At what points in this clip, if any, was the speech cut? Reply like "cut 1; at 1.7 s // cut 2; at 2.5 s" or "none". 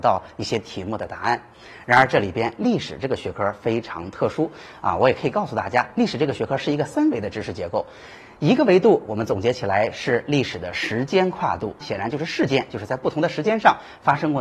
cut 1; at 11.8 s